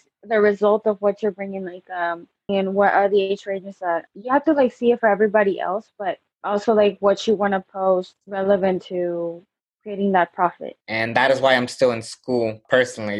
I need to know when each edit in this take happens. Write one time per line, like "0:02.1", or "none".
0:02.5
0:10.8